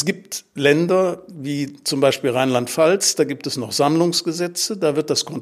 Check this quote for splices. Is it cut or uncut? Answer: uncut